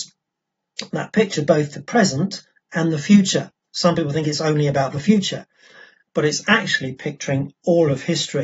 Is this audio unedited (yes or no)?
yes